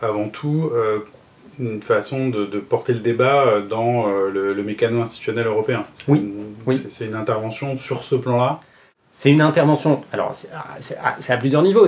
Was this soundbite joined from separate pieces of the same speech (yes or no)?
no